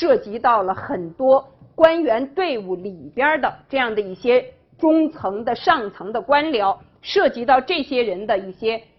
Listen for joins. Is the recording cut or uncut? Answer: uncut